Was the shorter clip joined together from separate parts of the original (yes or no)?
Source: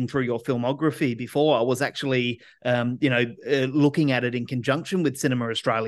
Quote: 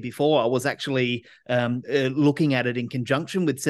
yes